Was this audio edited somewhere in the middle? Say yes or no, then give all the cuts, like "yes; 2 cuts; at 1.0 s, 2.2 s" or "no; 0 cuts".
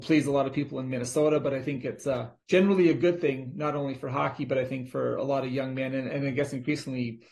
yes; 1 cut; at 2.4 s